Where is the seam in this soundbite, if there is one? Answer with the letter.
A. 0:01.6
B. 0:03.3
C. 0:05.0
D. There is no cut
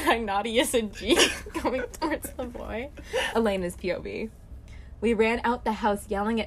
B